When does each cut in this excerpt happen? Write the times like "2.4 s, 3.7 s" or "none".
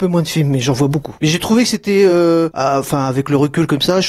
none